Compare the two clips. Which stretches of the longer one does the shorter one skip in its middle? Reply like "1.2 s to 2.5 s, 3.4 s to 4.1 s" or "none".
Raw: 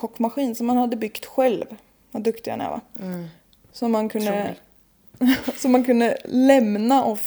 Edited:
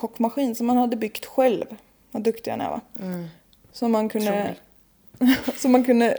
none